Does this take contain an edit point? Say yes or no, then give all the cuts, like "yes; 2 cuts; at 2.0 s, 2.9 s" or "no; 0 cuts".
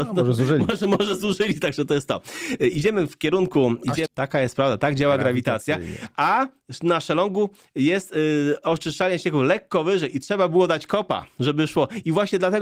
yes; 1 cut; at 4.1 s